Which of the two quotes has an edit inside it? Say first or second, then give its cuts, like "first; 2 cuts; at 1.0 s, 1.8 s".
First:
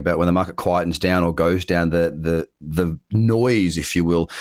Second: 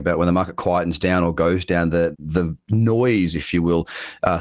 second; 1 cut; at 2.1 s